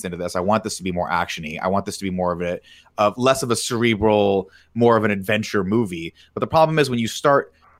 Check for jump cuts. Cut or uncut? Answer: uncut